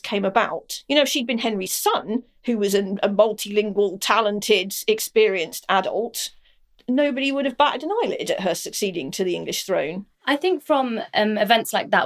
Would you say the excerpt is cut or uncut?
uncut